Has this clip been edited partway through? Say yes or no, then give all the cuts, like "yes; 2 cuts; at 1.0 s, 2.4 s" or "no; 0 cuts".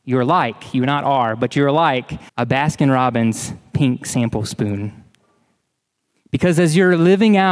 yes; 1 cut; at 2.3 s